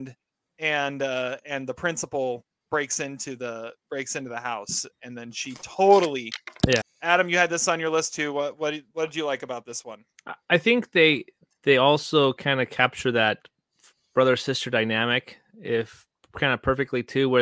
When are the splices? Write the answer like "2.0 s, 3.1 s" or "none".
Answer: 6.8 s